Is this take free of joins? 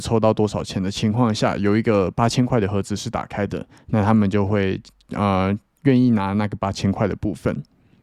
yes; 0 cuts

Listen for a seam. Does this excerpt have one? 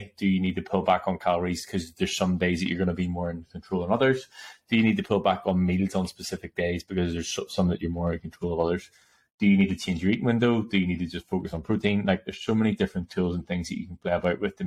no; 0 cuts

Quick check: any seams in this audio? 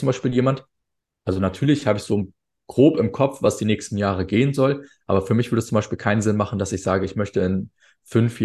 no; 0 cuts

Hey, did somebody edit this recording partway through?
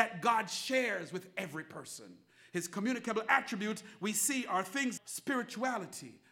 yes; 1 cut; at 5.0 s

